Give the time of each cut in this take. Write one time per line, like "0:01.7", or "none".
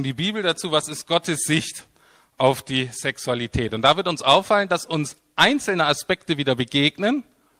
none